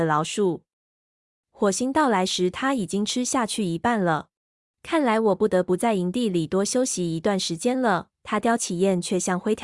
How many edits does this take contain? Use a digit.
2